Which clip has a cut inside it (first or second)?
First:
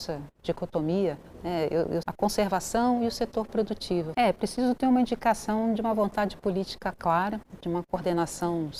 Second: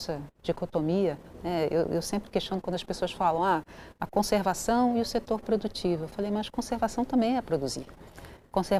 first